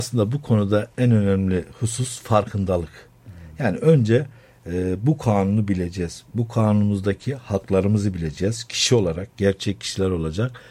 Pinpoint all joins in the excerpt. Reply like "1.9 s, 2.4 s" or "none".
none